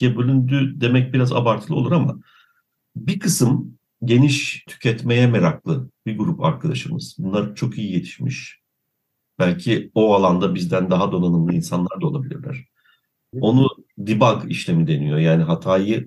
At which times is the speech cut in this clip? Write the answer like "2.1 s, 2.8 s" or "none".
4.7 s, 13.3 s